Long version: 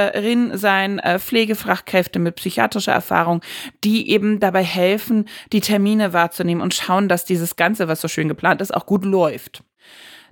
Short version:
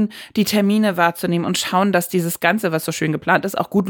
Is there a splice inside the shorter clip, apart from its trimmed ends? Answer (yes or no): no